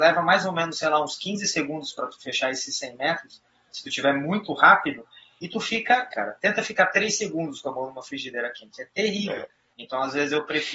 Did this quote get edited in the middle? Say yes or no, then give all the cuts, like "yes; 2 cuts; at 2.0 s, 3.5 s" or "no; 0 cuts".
yes; 2 cuts; at 6.1 s, 9.7 s